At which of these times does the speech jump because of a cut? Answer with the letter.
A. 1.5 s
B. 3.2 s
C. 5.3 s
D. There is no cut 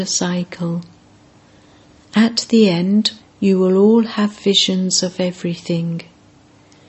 B